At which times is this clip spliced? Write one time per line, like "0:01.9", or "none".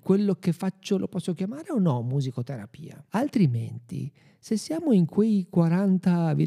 0:03.1